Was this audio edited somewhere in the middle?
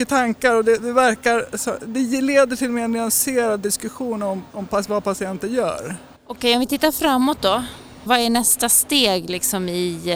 yes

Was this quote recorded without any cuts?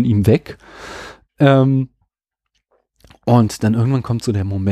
yes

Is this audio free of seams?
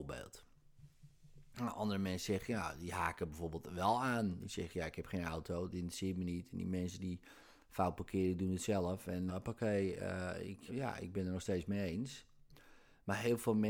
no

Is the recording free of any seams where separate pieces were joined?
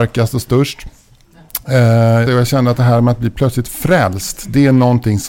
no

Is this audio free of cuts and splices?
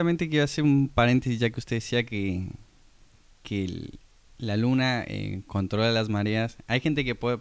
yes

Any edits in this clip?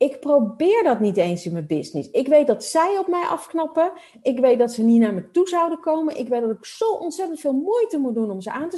no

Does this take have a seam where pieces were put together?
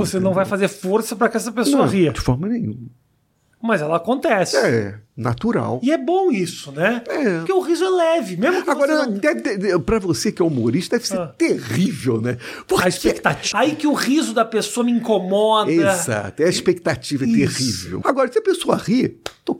yes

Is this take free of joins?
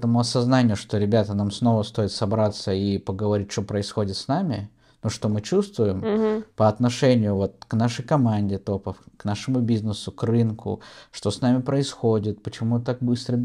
yes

